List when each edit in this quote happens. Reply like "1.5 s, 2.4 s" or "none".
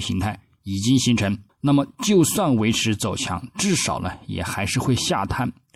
1.5 s